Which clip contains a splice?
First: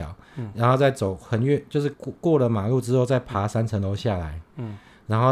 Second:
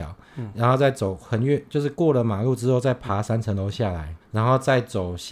second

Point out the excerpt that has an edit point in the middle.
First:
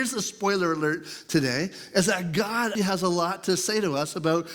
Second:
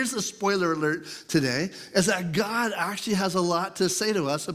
first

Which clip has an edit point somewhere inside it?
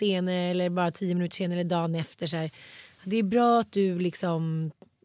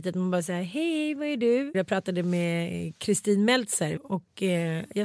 second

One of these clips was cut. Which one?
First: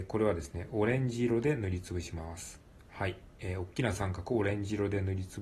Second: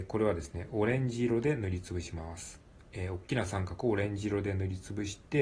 second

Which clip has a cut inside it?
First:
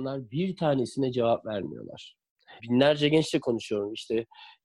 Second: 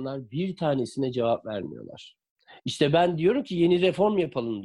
first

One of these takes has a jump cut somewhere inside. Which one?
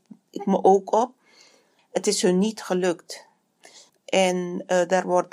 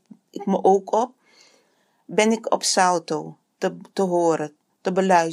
first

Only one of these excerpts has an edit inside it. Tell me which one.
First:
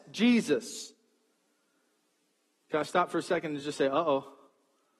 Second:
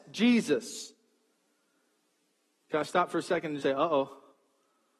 second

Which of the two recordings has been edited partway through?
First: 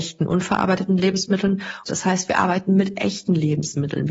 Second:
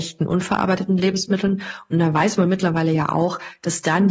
first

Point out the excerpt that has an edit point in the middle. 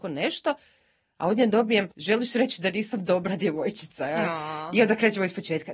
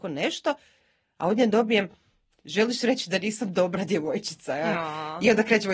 first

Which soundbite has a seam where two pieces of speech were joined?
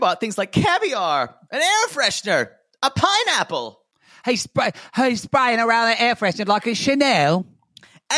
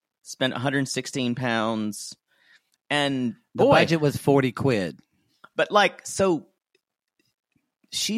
first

